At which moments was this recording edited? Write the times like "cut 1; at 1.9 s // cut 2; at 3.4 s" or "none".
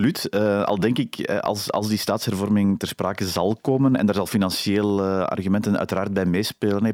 none